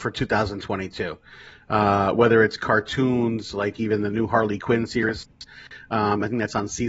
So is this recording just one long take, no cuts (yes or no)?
yes